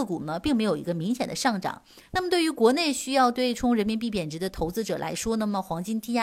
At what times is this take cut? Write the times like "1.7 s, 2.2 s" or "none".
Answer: 2.1 s